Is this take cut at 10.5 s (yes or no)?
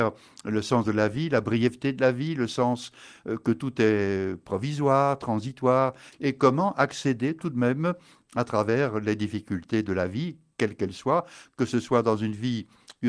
no